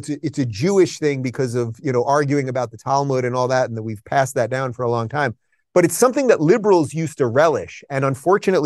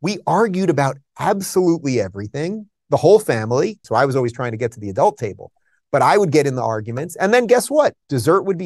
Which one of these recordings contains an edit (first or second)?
second